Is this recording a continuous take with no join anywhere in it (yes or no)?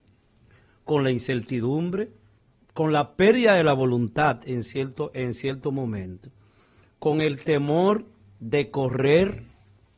no